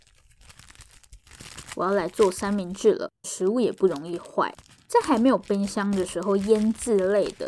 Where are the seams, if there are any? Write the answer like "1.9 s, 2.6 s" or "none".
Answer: 3.2 s